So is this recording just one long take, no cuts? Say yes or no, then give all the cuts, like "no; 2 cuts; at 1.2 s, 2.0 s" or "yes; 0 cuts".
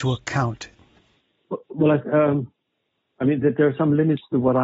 yes; 0 cuts